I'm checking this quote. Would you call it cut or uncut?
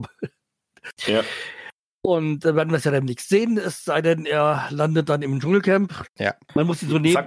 cut